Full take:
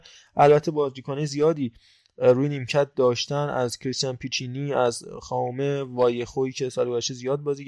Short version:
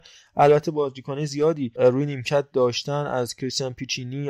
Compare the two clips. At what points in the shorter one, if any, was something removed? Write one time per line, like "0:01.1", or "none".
0:01.7